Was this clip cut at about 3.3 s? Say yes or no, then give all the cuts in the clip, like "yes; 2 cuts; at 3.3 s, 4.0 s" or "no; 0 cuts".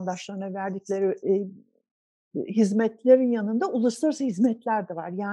no; 1 cut; at 1.2 s